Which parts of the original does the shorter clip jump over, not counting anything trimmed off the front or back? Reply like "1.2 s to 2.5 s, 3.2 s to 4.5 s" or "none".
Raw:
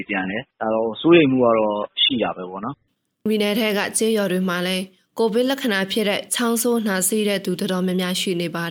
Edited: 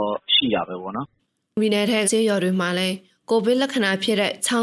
3.7 s to 3.9 s